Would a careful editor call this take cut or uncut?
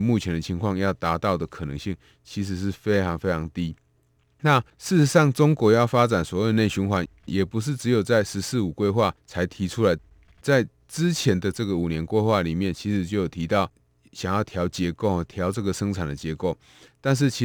uncut